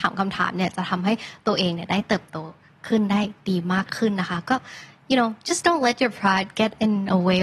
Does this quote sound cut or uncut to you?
uncut